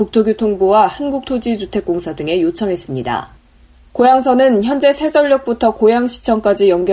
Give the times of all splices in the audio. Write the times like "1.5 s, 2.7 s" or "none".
none